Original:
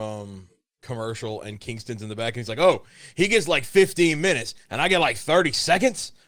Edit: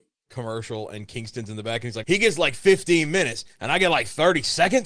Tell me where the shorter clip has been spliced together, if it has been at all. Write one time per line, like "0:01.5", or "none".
0:02.0

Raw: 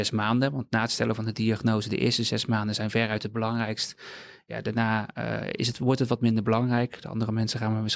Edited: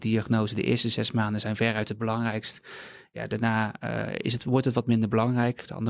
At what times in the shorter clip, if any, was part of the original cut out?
none

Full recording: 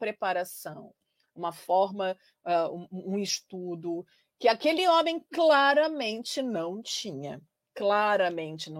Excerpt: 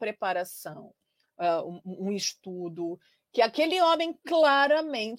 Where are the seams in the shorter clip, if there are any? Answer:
0:01.3

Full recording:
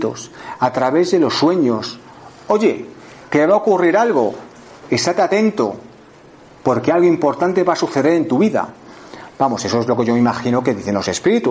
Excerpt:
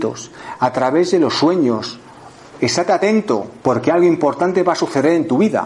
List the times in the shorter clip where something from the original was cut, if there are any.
0:02.4
0:03.6

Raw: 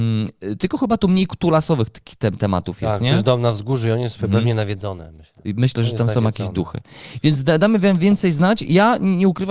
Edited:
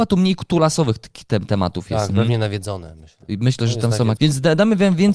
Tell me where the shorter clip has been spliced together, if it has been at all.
0:02.1
0:04.2

